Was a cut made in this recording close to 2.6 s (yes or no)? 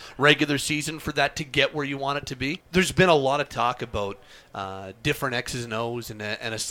yes